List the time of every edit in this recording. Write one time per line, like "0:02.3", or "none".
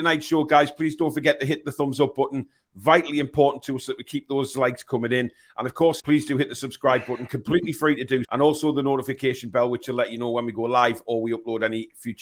0:06.0
0:08.2